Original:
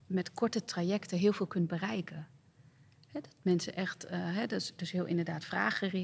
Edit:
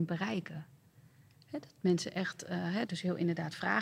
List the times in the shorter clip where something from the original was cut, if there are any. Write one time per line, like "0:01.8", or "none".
0:02.9